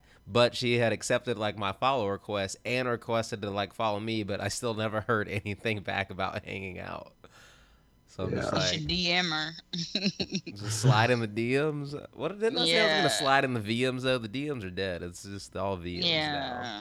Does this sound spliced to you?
no; 0 cuts

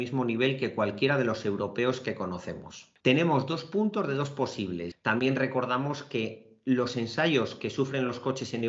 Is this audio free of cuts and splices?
no; 2 cuts; at 3.0 s, 4.9 s

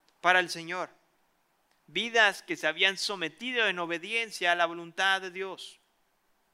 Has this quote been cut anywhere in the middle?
no; 0 cuts

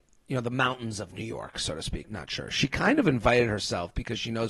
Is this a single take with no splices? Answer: no; 1 cut; at 2.0 s

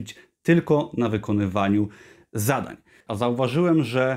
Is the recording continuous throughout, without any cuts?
no; 1 cut; at 3.1 s

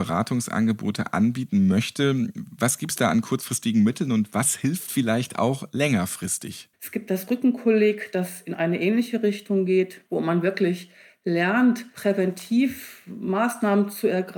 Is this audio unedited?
no; 1 cut; at 6.7 s

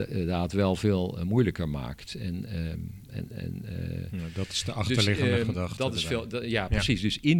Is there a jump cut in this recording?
no; 0 cuts

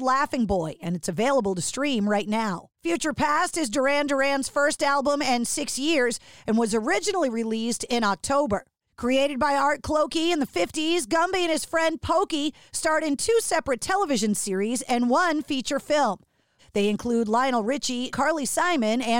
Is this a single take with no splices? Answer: no; 3 cuts; at 8.9 s, 16.6 s, 18.1 s

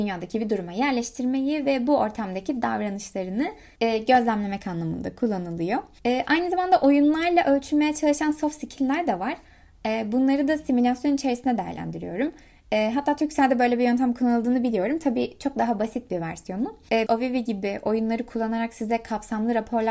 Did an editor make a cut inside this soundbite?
yes; 1 cut; at 17.1 s

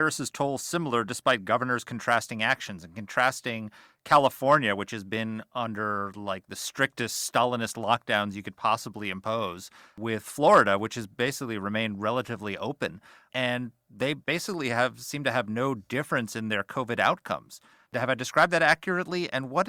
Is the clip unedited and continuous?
yes; 0 cuts

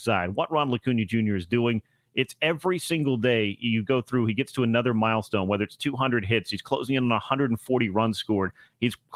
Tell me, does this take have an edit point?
no; 0 cuts

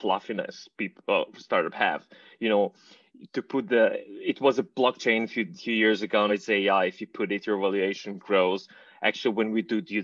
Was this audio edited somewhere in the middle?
yes; 2 cuts; at 3.3 s, 6.3 s

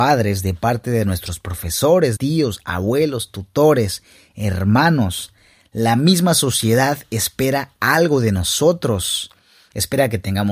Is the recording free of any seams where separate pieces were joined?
no; 1 cut; at 2.2 s

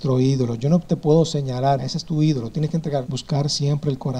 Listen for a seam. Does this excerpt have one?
yes; 2 cuts; at 1.8 s, 3.0 s

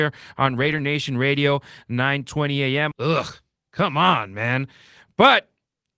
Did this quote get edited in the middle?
yes; 1 cut; at 2.9 s

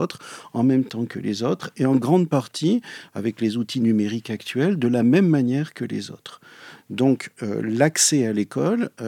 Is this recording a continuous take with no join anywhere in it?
yes; 0 cuts

